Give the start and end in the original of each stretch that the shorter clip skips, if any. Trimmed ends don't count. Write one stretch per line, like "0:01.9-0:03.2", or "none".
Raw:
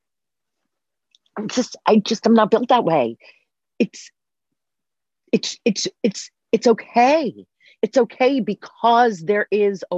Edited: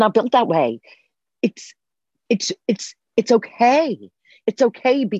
0:04.6-0:05.6